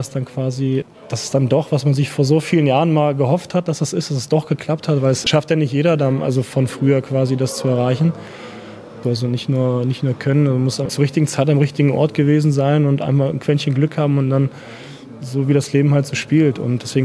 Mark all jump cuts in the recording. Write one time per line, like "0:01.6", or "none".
0:09.0

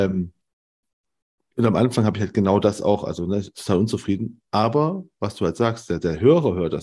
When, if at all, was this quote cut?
none

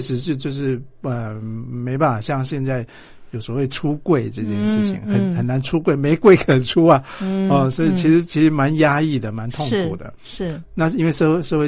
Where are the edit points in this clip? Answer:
none

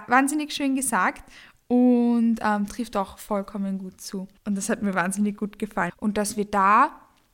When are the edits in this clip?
0:04.4
0:05.9

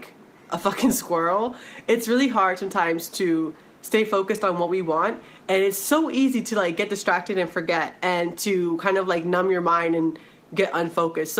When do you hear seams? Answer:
none

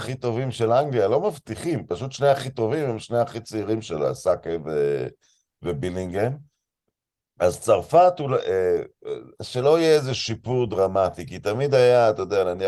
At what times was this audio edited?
0:09.3

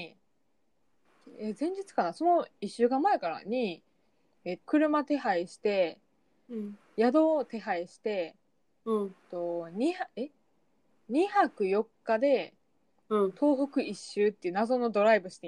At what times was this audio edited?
0:04.6

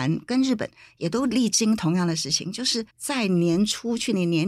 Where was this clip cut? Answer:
0:02.9

